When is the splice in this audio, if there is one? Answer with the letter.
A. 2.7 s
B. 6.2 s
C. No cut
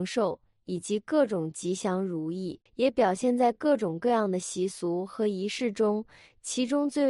A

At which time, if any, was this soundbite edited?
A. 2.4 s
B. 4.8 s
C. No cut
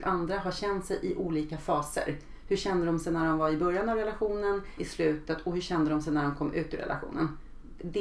B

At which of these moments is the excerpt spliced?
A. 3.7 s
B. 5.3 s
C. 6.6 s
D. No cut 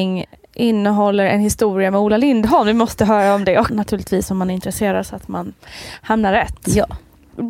A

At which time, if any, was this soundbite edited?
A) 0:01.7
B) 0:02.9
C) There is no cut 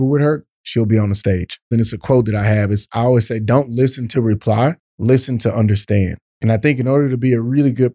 A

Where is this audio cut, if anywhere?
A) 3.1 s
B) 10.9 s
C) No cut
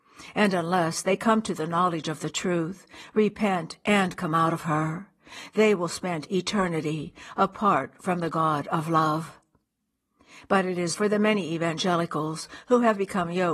B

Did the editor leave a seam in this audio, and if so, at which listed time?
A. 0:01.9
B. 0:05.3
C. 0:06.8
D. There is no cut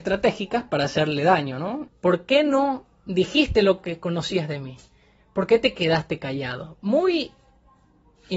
A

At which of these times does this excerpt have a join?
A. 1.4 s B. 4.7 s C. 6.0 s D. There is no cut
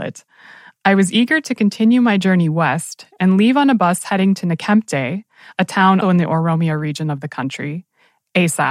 C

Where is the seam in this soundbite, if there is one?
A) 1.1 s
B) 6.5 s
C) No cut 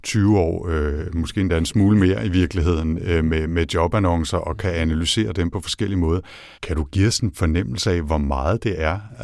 B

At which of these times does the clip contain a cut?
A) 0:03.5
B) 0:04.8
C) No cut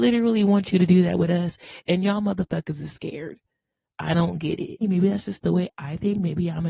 B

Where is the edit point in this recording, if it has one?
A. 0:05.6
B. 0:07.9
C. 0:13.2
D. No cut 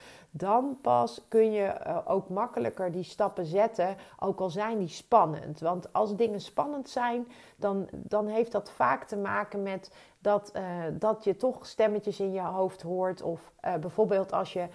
B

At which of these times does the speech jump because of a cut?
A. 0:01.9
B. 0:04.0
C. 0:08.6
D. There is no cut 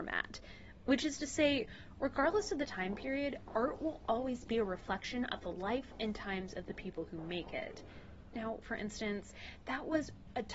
C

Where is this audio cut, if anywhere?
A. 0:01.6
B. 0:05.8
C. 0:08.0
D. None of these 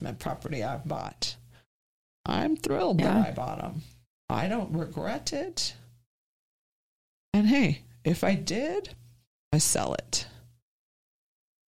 D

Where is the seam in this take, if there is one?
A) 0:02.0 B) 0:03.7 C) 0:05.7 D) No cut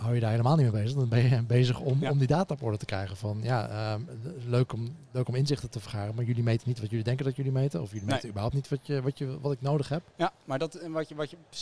C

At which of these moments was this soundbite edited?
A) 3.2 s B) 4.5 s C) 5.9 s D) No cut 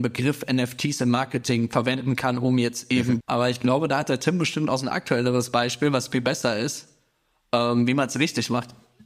A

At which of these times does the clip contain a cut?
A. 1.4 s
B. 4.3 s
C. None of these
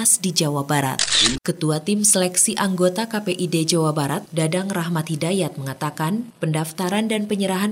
A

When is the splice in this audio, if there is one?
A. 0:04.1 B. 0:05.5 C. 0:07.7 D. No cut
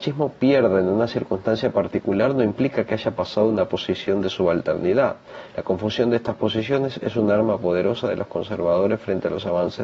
B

